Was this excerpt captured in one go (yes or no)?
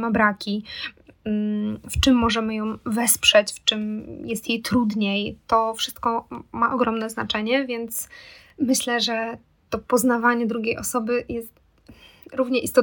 yes